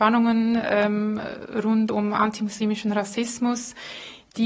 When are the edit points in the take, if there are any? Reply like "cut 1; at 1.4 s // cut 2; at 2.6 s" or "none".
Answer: none